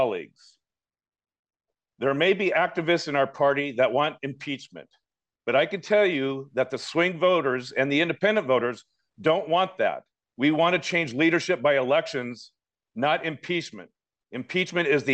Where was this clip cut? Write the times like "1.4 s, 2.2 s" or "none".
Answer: none